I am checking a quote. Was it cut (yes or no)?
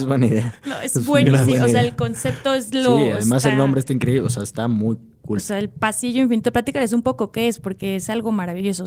no